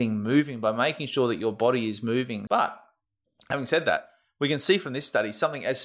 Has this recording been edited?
yes; 1 cut; at 2.5 s

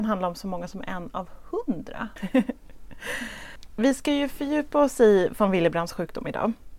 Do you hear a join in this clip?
yes; 1 cut; at 2.2 s

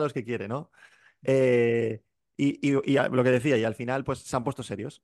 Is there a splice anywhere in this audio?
no; 0 cuts

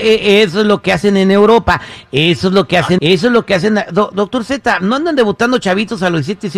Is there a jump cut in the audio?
yes; 1 cut; at 3.0 s

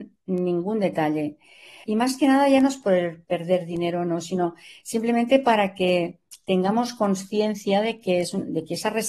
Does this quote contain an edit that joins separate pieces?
yes; 1 cut; at 1.8 s

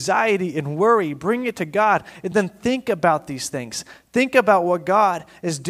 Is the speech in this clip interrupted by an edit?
no; 0 cuts

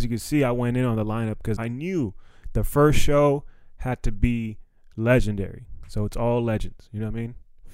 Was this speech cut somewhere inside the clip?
yes; 1 cut; at 1.6 s

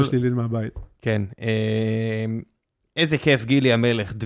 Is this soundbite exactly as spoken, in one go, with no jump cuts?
yes; 0 cuts

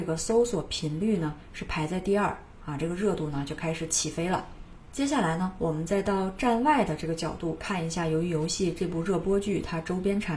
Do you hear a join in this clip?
no; 0 cuts

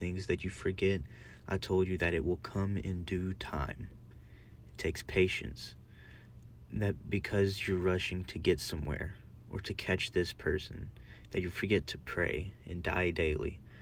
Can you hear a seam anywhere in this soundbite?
no; 0 cuts

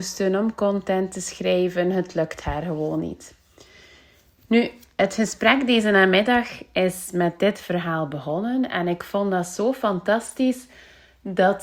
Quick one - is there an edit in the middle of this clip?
no; 0 cuts

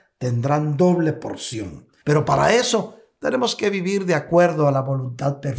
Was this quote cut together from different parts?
yes; 1 cut; at 2.0 s

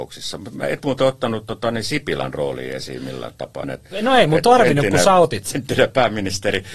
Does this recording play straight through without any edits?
no; 2 cuts; at 3.6 s, 5.5 s

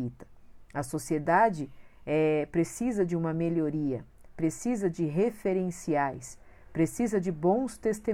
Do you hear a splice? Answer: no; 0 cuts

